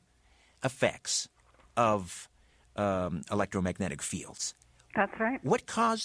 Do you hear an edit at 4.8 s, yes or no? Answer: no